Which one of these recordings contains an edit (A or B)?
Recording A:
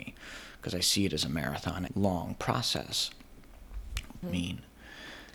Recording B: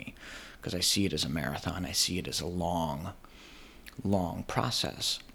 A